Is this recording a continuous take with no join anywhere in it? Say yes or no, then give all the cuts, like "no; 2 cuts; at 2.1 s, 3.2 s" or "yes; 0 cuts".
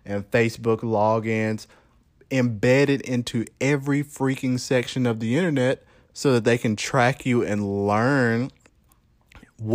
yes; 0 cuts